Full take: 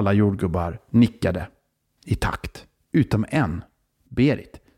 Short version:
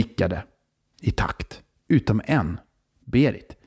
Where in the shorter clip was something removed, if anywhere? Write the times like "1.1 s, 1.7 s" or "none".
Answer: none